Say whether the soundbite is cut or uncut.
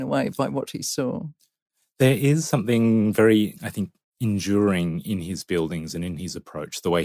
uncut